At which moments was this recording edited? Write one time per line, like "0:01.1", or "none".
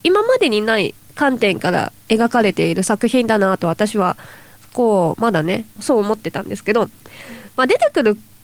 0:05.8